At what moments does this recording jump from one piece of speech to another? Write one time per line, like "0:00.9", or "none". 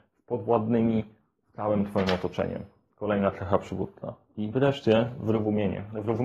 none